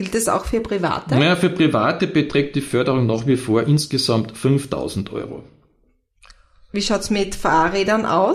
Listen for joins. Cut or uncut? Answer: uncut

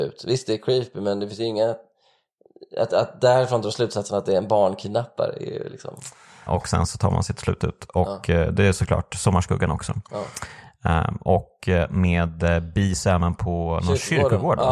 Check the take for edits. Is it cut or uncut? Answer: cut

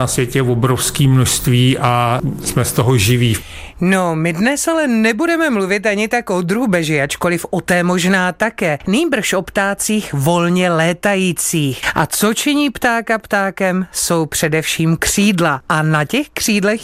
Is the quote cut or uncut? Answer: uncut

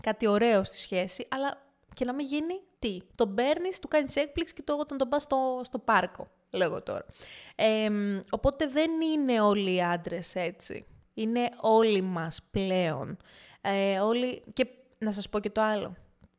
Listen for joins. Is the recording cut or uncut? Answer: uncut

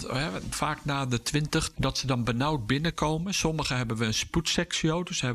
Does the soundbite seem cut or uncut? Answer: cut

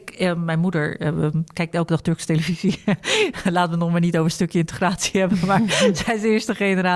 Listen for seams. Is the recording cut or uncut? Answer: uncut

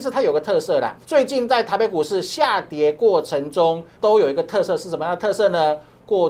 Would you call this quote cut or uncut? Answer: cut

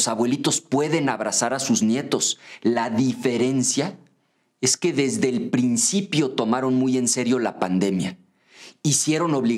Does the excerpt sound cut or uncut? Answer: uncut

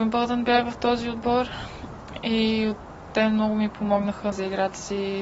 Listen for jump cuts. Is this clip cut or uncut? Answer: cut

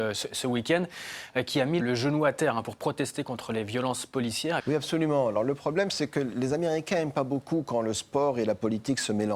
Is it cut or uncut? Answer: cut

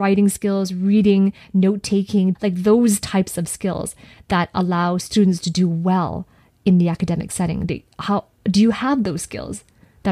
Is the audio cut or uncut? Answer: cut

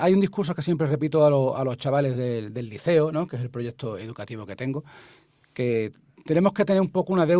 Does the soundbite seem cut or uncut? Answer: uncut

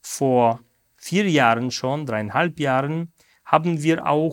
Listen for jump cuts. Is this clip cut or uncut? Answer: uncut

